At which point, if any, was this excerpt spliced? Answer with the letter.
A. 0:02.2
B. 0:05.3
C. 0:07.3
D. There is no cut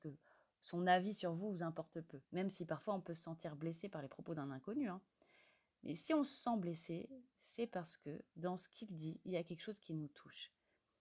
A